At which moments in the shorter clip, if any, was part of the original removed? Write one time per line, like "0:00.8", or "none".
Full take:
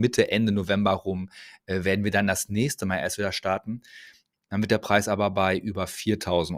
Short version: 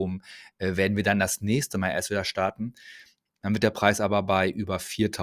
none